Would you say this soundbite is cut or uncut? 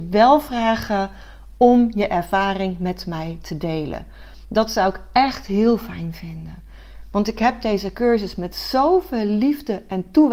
uncut